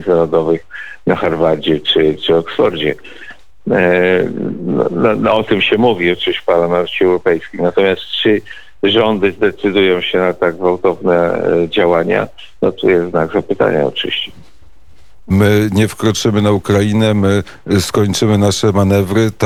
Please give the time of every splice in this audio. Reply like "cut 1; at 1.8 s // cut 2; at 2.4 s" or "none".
cut 1; at 15.3 s